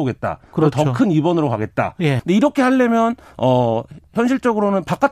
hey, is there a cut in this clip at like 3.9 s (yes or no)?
no